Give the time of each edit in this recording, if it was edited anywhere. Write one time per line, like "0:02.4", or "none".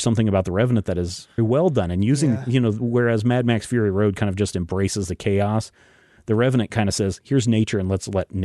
0:01.4